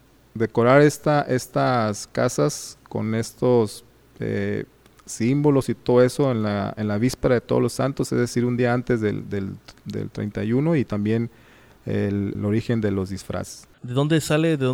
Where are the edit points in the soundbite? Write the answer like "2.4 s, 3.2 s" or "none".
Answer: 12.3 s, 13.8 s